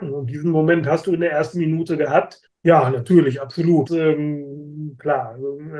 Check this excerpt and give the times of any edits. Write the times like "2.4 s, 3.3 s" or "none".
2.5 s, 3.9 s